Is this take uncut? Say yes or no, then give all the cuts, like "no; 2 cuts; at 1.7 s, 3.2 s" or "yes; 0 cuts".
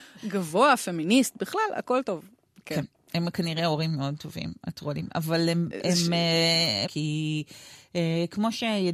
no; 1 cut; at 6.9 s